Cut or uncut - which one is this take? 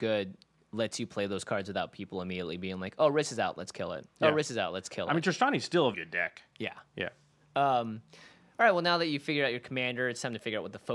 cut